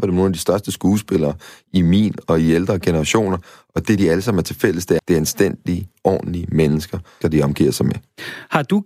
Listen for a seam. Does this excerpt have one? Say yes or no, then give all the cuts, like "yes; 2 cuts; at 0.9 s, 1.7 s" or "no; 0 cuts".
yes; 2 cuts; at 5.0 s, 7.2 s